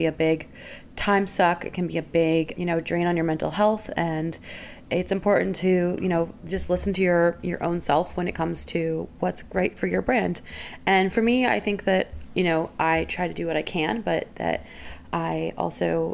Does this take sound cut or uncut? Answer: uncut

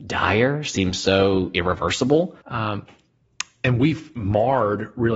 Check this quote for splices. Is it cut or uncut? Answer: cut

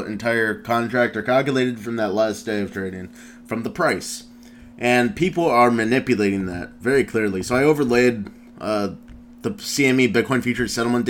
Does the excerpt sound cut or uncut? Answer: uncut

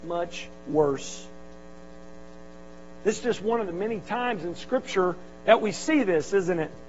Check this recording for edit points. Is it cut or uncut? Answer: uncut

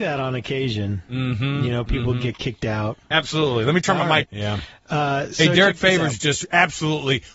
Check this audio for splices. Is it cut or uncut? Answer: cut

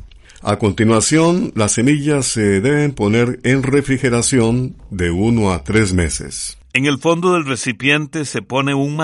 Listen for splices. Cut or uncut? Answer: cut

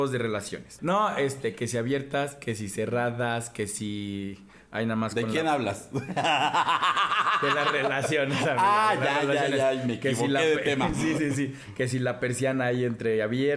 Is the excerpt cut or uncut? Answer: uncut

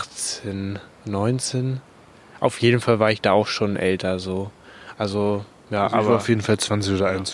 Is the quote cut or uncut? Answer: uncut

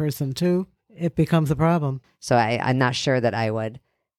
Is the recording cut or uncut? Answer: cut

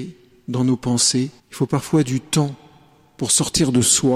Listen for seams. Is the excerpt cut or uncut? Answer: cut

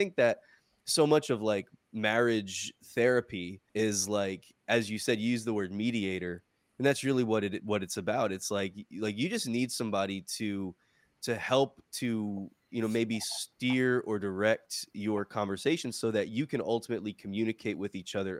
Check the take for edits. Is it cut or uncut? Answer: cut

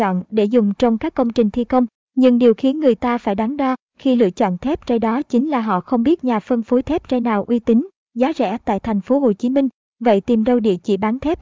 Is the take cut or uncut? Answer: uncut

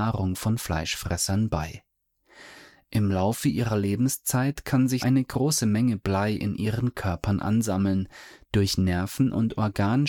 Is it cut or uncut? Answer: cut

